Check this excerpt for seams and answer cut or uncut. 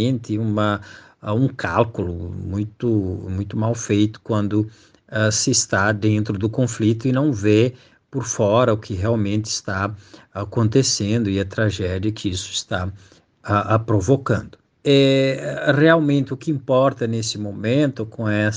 cut